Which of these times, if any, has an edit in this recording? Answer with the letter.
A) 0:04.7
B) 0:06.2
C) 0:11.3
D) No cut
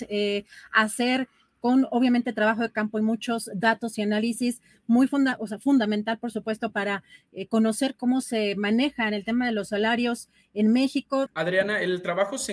C